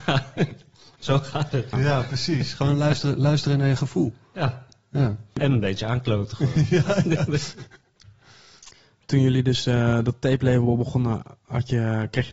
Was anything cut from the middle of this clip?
yes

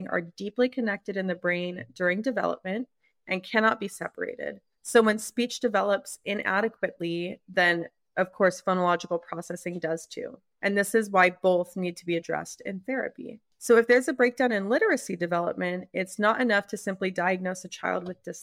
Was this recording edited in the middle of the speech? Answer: no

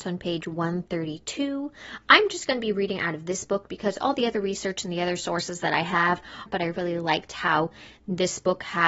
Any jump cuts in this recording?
yes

